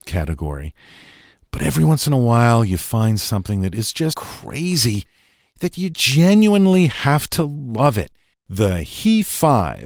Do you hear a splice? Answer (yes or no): yes